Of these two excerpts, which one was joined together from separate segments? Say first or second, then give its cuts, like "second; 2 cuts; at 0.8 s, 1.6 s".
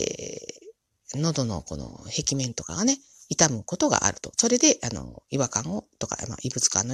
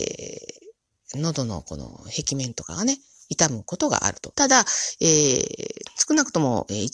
second; 1 cut; at 4.3 s